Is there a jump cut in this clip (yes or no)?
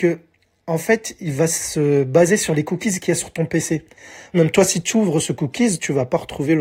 yes